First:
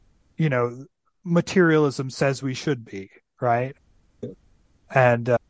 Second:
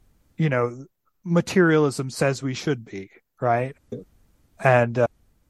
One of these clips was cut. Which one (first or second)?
second